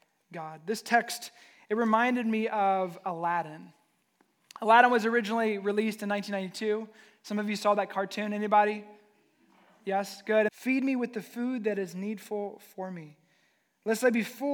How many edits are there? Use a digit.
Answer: 1